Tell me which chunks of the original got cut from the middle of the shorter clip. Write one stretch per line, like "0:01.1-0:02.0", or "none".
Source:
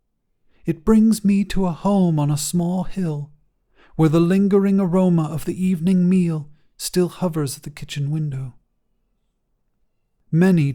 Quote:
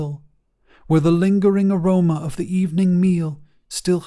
none